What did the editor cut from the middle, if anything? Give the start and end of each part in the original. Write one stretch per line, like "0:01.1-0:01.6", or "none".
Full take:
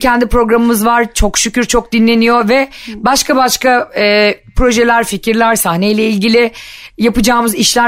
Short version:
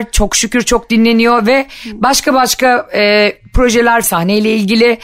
0:05.1-0:05.6